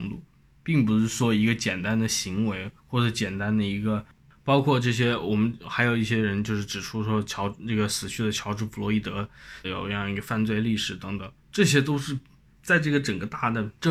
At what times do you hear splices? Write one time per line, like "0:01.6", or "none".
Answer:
0:02.8
0:09.6
0:11.4

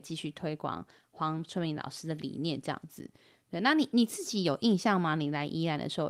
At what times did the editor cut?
none

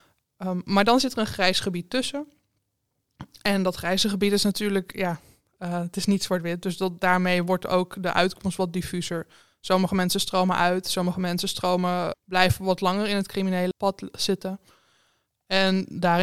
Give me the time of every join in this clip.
0:12.1
0:13.7

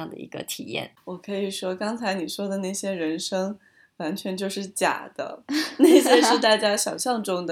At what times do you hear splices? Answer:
0:01.0

